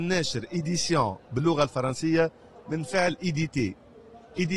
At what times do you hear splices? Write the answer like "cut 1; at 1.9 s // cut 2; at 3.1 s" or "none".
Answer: none